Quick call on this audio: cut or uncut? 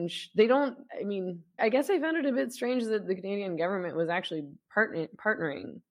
cut